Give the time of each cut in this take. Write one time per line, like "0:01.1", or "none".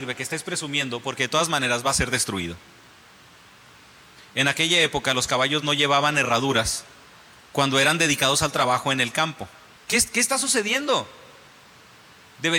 0:09.8